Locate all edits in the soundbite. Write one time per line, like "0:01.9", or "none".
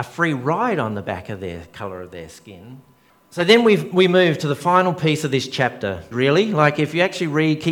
0:03.1
0:06.1